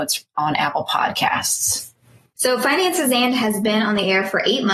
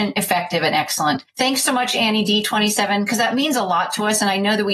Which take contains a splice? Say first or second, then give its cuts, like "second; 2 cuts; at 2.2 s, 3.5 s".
first; 1 cut; at 2.4 s